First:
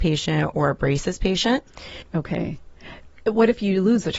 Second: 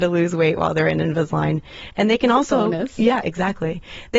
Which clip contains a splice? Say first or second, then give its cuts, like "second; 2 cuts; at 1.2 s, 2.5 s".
first; 1 cut; at 2.0 s